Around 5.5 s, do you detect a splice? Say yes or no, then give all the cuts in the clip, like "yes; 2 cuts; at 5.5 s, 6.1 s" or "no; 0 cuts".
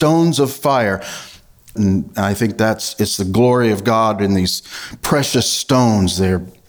no; 1 cut; at 1.8 s